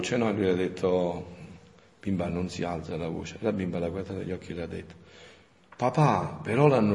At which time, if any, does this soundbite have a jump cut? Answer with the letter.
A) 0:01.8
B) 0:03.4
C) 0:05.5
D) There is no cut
D